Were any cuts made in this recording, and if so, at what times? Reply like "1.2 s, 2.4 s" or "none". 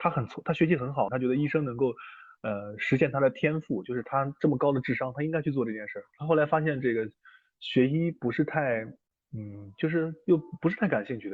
1.1 s

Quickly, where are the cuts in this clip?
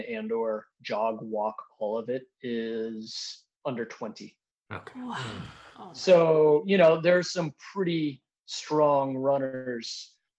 3.5 s

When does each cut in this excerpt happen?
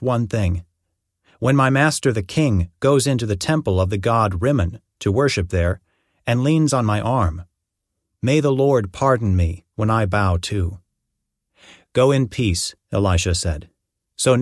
none

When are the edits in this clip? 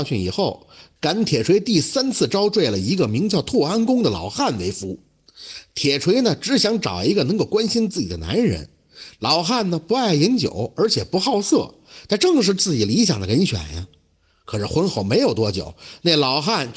none

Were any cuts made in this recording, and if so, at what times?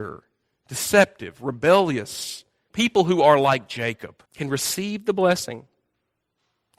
2.7 s, 4.3 s

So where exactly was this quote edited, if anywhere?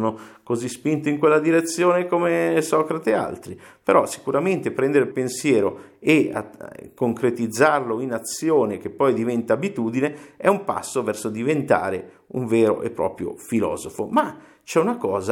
5.1 s

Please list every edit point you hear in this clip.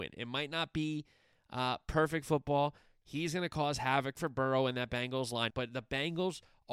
3.0 s, 5.5 s

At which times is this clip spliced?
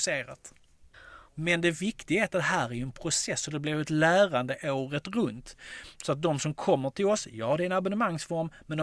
1.3 s

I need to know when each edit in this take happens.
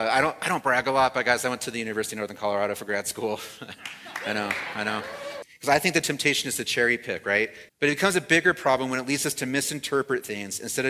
5.4 s, 7.7 s

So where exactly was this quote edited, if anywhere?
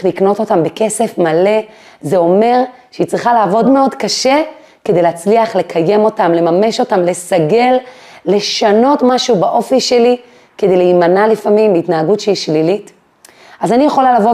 3.6 s

